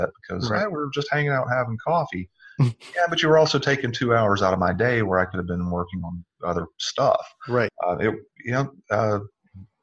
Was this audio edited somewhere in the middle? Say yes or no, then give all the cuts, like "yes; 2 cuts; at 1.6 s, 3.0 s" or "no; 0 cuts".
yes; 1 cut; at 7.7 s